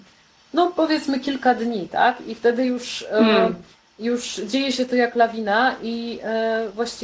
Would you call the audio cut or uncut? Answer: uncut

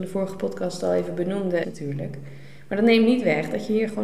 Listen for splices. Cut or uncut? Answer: cut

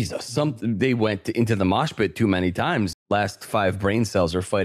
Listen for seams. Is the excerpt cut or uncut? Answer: cut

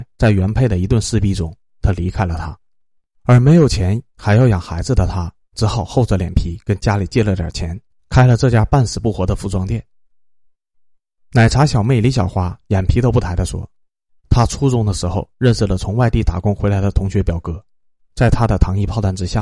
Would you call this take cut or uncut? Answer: uncut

